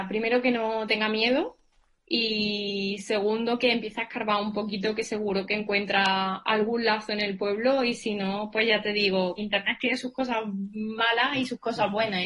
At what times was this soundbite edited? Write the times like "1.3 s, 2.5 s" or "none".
9.4 s

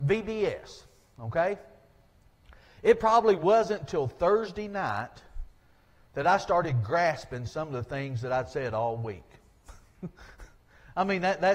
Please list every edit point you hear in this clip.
none

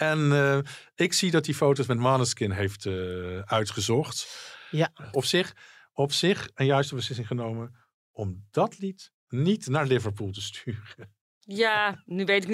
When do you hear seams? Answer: 5.1 s

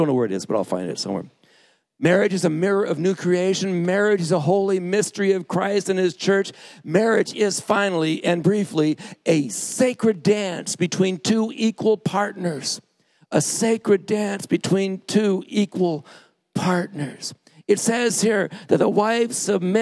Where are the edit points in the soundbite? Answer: none

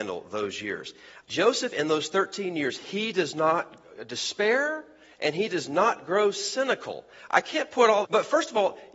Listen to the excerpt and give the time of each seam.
1.2 s, 8.0 s

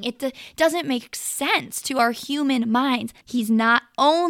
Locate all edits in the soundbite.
3.2 s

